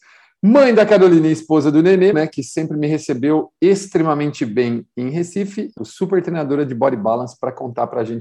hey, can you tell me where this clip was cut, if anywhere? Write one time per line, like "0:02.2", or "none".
0:02.1
0:05.8